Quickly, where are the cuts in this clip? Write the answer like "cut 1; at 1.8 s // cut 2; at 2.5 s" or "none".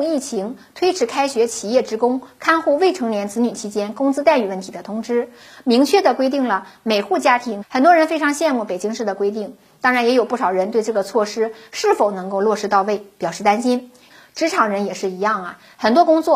cut 1; at 7.6 s // cut 2; at 14.1 s